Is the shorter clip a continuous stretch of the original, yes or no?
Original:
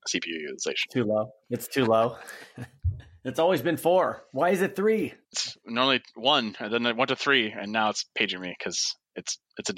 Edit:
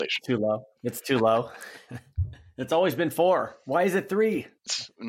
yes